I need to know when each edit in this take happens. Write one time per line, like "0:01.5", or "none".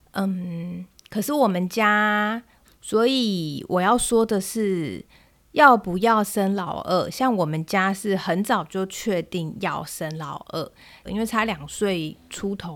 0:02.6
0:11.0